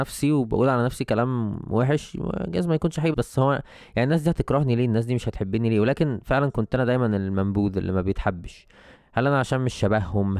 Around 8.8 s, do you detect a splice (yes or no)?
no